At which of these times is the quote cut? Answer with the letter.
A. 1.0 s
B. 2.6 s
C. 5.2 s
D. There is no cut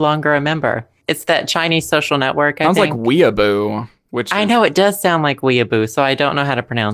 A